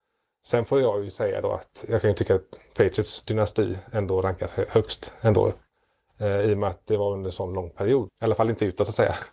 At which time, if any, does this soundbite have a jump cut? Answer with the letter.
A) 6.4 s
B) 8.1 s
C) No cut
B